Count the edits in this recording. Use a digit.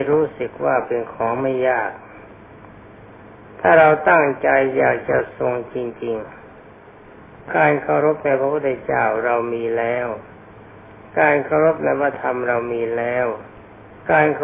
1